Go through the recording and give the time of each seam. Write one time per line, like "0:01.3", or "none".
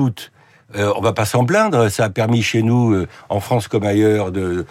none